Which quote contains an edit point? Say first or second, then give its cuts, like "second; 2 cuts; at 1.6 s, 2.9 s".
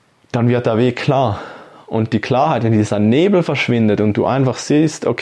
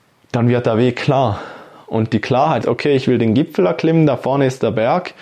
second; 1 cut; at 2.6 s